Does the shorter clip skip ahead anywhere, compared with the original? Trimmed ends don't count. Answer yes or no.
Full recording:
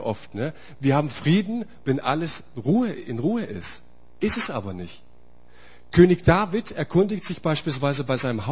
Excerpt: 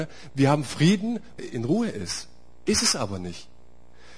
yes